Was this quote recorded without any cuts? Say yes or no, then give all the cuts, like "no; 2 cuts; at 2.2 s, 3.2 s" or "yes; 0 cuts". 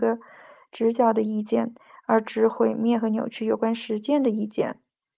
yes; 0 cuts